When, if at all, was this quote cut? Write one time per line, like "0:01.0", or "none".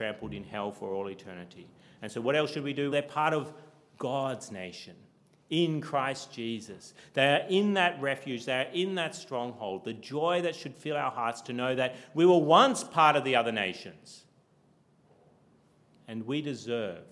0:02.9